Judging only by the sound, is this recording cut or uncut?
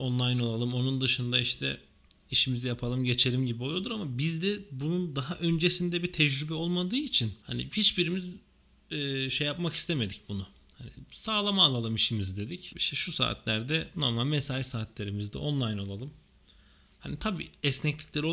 uncut